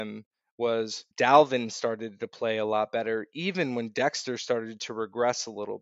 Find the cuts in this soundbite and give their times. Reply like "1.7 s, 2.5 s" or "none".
1.1 s